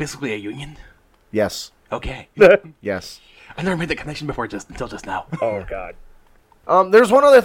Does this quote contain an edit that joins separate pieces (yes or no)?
no